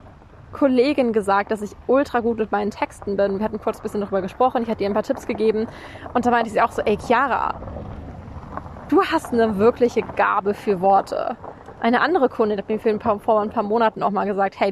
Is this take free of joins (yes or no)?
yes